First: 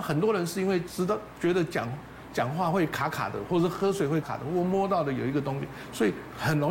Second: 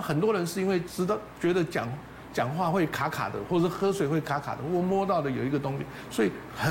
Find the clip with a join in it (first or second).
first